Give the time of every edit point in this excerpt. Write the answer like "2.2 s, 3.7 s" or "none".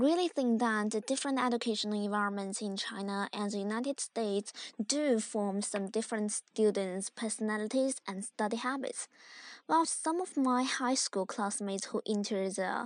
9.8 s